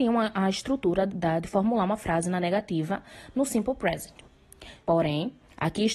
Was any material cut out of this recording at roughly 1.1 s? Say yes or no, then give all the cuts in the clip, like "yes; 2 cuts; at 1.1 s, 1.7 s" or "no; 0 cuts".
yes; 2 cuts; at 1.1 s, 4.8 s